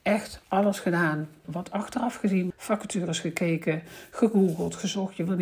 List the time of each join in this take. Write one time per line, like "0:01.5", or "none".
0:01.4
0:02.5